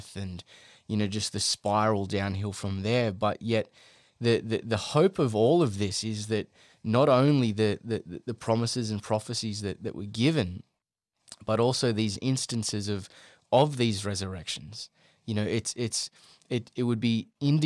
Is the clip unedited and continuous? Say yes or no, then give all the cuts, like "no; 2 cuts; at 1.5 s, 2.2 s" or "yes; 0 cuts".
yes; 0 cuts